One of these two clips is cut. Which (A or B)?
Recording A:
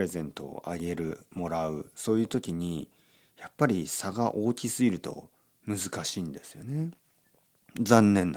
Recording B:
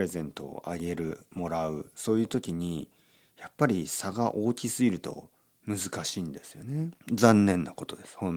B